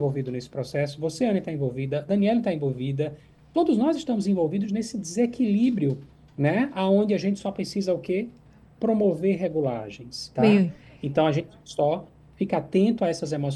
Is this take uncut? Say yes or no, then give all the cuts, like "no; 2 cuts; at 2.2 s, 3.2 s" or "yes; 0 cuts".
no; 1 cut; at 10.3 s